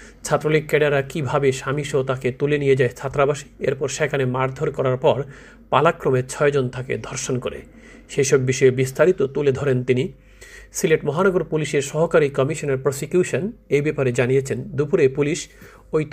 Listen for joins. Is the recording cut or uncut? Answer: uncut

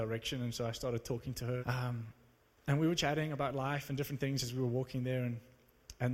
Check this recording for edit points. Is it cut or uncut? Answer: cut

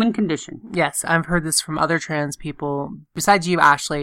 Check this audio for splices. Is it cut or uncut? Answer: uncut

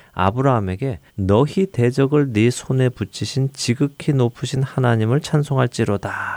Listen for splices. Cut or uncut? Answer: cut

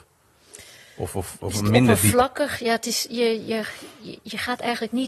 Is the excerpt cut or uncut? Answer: uncut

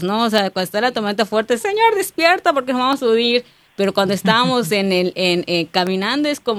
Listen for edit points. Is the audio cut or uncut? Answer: cut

